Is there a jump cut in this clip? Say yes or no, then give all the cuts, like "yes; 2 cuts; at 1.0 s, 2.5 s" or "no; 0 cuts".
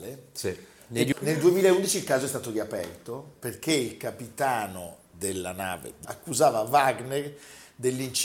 yes; 3 cuts; at 1.1 s, 3.3 s, 6.0 s